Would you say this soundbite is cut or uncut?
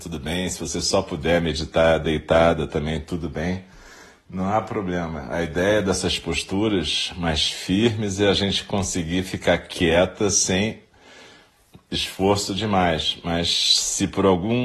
uncut